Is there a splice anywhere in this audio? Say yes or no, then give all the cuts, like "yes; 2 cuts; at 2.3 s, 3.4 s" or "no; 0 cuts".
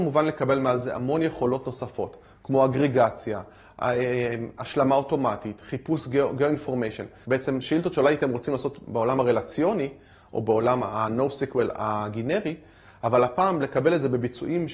yes; 1 cut; at 7.2 s